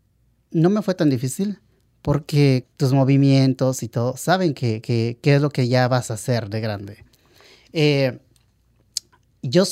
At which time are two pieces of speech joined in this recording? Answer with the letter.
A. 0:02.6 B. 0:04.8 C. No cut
A